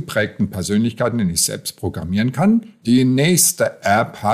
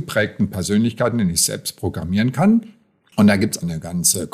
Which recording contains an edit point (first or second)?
first